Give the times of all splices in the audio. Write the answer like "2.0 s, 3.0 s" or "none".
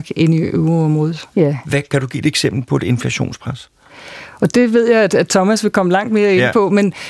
1.3 s

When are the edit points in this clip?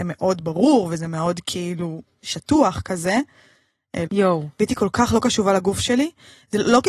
4.1 s

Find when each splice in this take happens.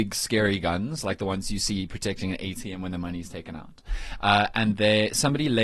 none

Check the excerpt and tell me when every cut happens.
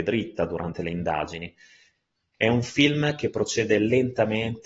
2.3 s

